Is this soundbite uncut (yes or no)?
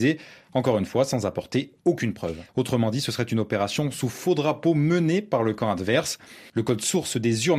no